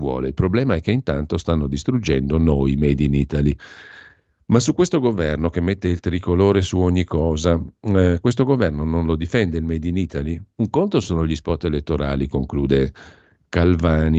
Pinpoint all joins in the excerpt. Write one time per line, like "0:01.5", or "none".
none